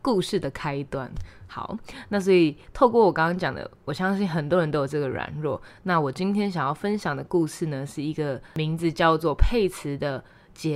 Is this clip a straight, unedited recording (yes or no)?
yes